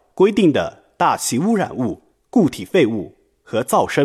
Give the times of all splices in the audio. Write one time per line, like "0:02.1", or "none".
0:02.1